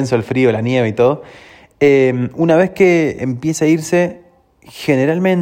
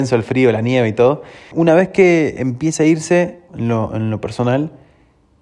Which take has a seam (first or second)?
second